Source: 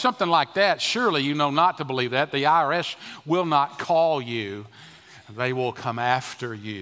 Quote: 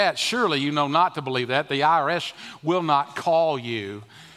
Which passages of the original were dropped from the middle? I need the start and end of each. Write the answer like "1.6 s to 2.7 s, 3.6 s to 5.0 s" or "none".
none